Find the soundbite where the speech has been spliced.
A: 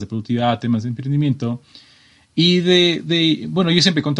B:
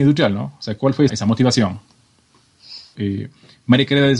B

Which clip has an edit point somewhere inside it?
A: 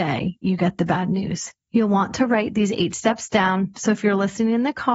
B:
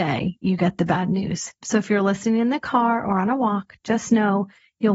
B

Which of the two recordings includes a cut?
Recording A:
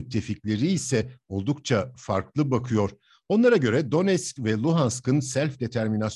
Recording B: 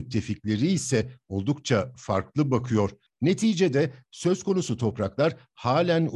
B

